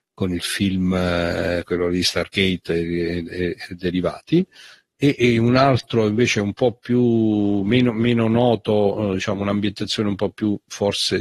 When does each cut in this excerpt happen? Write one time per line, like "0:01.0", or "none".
none